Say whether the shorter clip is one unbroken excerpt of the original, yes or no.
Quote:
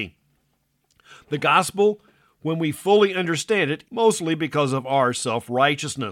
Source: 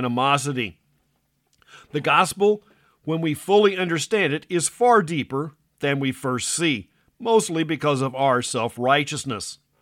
no